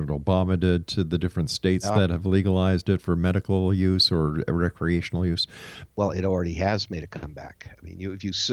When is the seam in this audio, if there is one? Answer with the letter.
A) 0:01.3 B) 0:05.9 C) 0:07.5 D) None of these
B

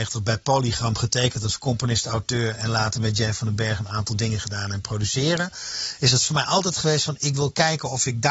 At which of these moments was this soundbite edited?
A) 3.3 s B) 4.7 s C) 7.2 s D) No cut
C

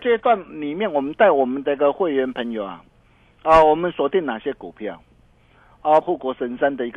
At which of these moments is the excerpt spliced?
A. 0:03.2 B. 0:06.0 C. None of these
B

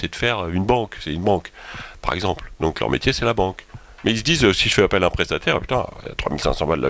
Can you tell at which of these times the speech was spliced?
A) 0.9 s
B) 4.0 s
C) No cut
B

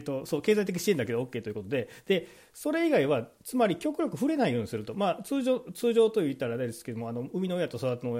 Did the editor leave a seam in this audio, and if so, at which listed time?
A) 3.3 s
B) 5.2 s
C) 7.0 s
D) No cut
D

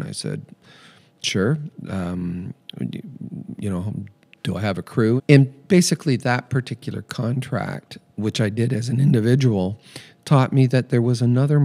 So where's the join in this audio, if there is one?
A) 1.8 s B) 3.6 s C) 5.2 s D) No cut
C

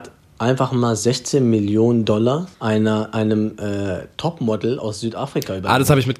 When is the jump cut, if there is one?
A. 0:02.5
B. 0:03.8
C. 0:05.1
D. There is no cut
A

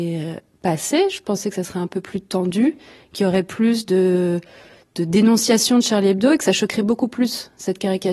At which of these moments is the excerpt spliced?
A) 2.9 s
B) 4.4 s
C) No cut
C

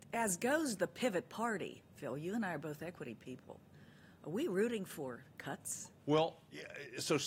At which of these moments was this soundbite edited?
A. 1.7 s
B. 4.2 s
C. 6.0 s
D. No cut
C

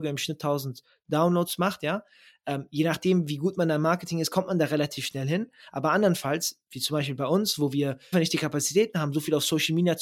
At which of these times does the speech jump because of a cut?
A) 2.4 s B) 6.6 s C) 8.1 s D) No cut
C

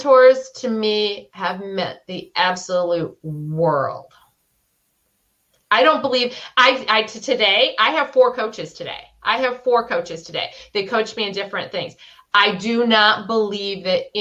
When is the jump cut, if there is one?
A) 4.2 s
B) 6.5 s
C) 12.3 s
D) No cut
D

